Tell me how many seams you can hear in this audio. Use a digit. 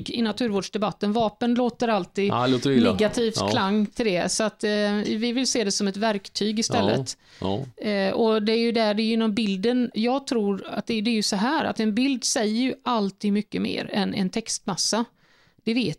1